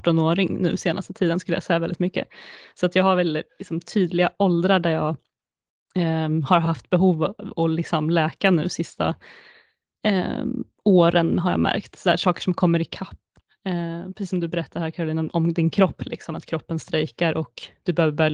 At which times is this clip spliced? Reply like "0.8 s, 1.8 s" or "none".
16.3 s